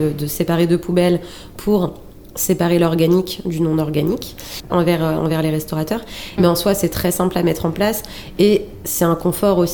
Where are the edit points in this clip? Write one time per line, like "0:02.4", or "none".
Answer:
0:04.7
0:06.4